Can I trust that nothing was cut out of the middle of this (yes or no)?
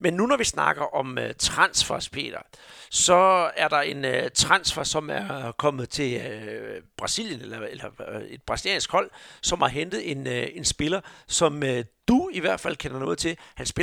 yes